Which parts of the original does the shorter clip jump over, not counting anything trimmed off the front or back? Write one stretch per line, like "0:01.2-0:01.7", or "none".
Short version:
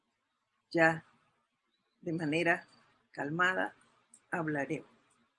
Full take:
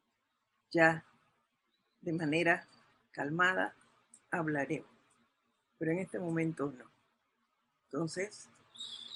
none